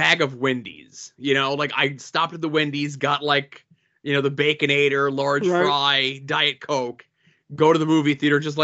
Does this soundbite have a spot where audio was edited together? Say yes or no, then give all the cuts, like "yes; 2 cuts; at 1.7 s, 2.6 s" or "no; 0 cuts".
no; 0 cuts